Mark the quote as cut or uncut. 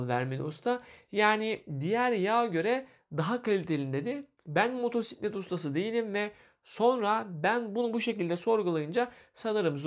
uncut